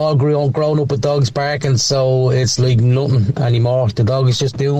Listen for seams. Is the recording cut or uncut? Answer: uncut